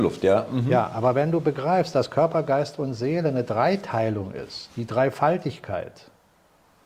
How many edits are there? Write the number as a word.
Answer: zero